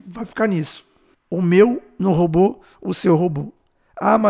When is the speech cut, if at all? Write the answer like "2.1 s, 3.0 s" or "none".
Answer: 1.1 s